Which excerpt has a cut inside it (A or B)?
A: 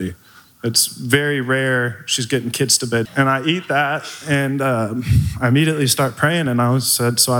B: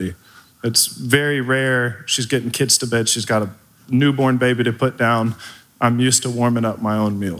A